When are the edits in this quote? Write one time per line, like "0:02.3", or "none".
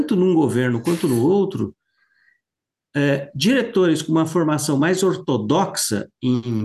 none